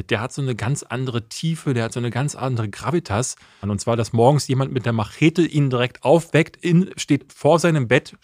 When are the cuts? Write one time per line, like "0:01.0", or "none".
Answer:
0:03.6